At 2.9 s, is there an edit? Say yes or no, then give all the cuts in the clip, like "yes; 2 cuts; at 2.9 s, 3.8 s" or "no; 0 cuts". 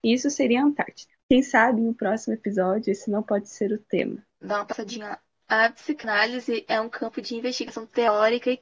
no; 2 cuts; at 1.2 s, 4.3 s